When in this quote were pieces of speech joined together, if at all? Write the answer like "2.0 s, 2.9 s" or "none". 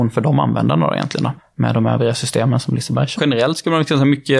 1.4 s, 3.2 s

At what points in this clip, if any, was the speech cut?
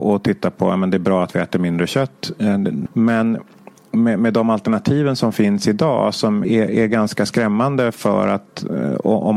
2.9 s, 6.4 s

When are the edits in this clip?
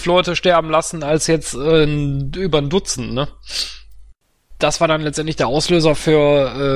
none

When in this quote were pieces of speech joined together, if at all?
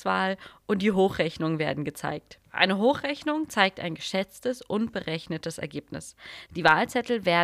2.4 s, 6.5 s

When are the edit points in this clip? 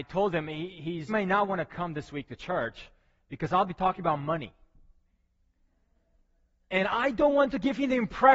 1.1 s

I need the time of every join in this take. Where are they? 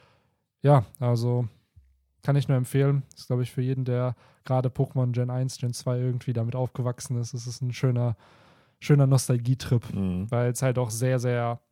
none

